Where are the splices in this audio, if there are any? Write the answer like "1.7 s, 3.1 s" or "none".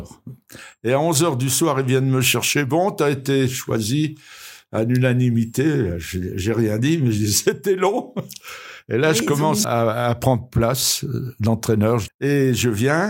9.6 s, 12.1 s